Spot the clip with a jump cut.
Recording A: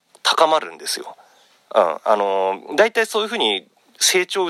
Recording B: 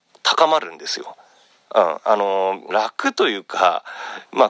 B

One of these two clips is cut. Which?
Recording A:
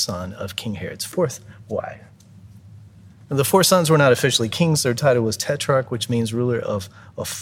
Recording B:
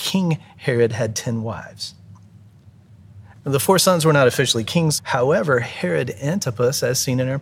B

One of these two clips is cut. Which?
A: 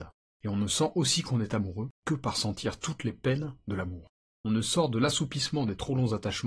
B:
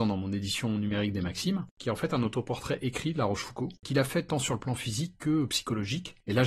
B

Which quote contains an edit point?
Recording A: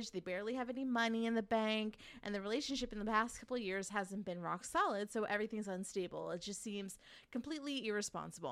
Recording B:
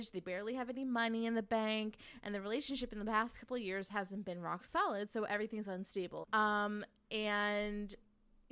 B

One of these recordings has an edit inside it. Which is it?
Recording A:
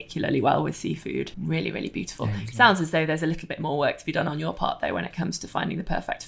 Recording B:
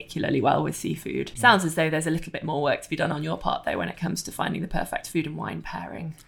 B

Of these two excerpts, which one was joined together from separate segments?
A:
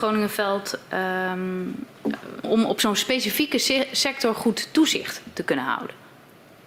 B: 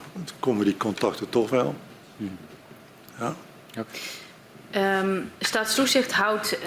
A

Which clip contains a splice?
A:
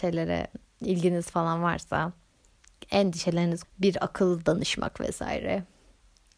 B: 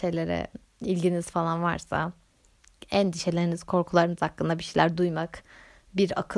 A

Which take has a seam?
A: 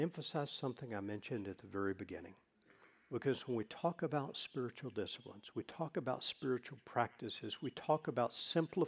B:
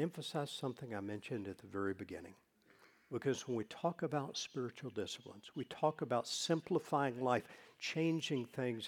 B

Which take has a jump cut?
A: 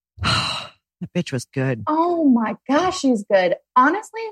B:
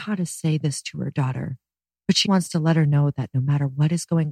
B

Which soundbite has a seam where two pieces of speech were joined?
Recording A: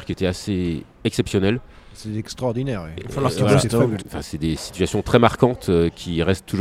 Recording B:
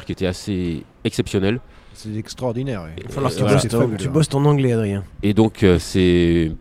A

